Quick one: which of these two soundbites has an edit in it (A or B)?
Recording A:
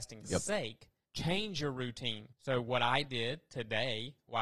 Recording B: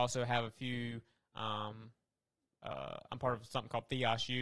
A